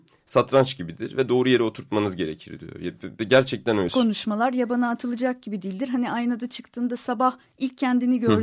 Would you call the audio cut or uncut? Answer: cut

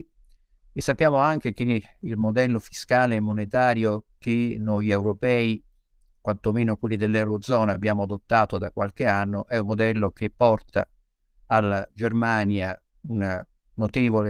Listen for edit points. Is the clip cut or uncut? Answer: uncut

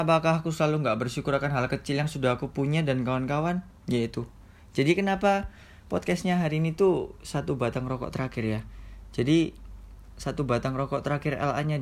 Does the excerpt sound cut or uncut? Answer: uncut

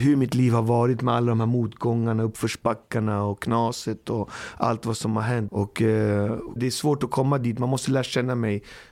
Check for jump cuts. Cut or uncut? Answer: cut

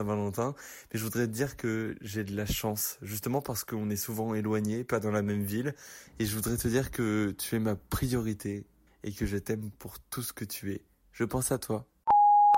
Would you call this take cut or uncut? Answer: cut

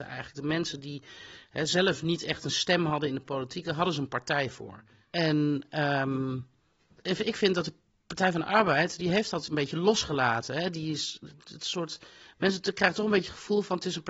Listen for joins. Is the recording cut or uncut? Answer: cut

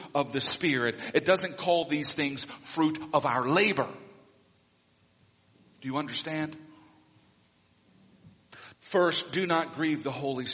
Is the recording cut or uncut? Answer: cut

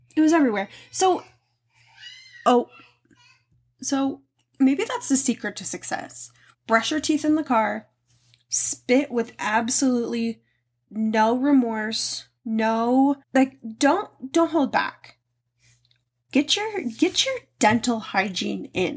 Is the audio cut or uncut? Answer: cut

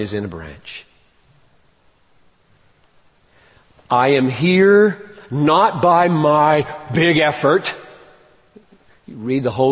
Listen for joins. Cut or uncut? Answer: uncut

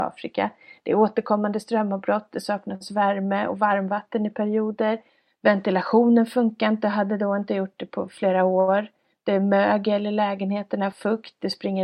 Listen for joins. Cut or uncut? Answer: uncut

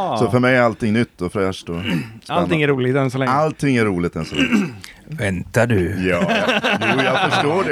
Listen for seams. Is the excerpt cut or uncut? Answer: uncut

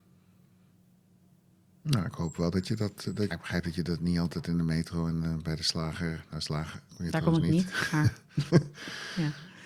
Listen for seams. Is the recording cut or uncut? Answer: cut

